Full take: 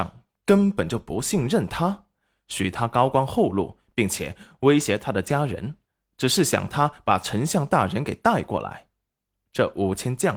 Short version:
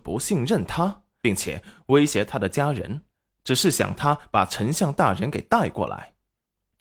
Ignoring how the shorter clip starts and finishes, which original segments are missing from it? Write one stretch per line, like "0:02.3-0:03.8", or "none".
0:02.2-0:03.9